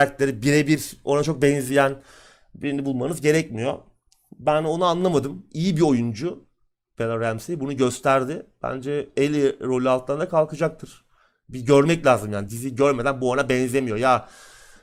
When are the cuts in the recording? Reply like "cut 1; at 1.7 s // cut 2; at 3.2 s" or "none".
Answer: cut 1; at 12.5 s